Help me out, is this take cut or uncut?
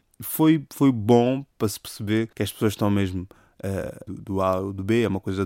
cut